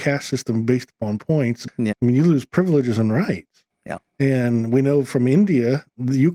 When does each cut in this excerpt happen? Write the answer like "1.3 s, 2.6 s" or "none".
1.9 s